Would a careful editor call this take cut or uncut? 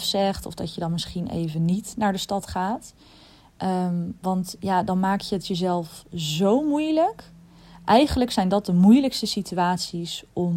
uncut